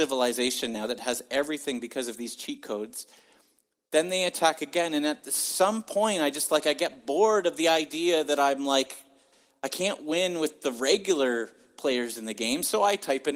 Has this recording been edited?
no; 0 cuts

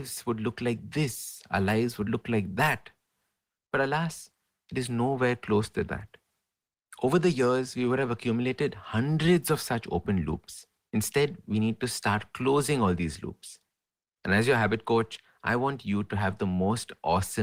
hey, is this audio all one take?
no; 1 cut; at 10.9 s

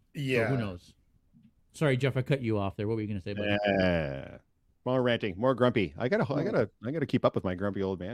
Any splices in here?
no; 0 cuts

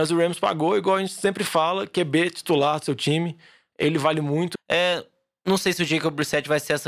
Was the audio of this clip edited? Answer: yes; 1 cut; at 4.6 s

